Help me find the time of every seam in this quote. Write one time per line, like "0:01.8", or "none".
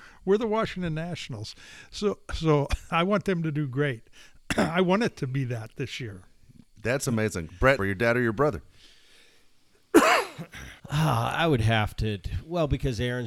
0:07.8
0:10.8